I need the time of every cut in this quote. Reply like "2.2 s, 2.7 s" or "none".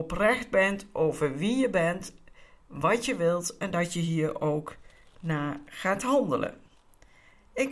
none